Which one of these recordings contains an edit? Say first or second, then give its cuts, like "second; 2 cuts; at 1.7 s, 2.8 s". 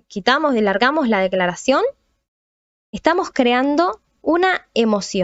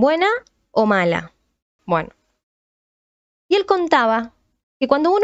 second; 1 cut; at 1.8 s